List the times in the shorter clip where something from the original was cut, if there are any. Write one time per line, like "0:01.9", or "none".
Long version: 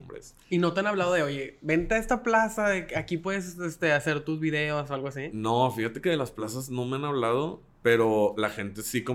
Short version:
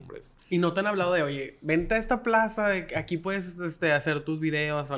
none